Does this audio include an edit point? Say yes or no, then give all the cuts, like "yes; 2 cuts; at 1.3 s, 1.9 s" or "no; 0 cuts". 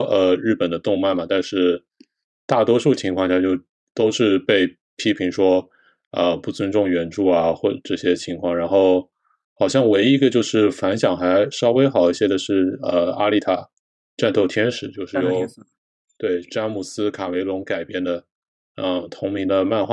no; 0 cuts